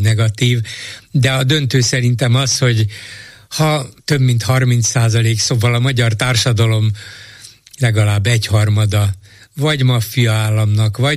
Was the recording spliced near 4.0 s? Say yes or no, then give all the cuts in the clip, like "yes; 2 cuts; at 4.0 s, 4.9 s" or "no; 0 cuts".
yes; 1 cut; at 4.0 s